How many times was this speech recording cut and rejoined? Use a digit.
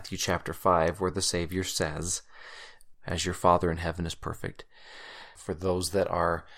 2